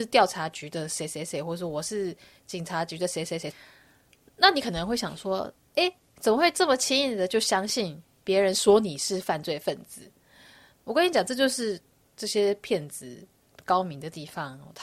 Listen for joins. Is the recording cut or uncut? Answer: cut